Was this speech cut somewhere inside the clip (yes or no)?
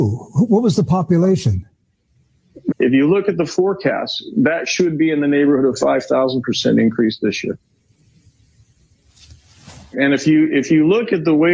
yes